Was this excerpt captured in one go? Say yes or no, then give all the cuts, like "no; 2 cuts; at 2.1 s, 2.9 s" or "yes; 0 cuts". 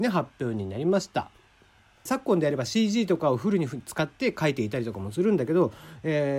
no; 1 cut; at 2.1 s